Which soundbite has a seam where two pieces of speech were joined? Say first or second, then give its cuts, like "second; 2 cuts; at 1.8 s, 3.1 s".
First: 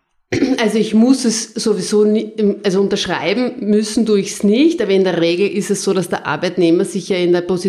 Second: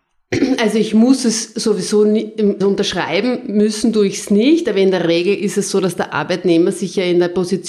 second; 1 cut; at 2.6 s